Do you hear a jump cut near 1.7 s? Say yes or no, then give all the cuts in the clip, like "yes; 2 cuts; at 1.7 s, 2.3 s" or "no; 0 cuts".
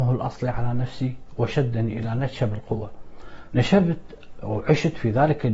no; 1 cut; at 3.5 s